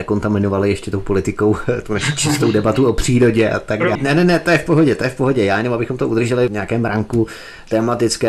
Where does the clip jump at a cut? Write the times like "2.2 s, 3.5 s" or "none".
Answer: 4.0 s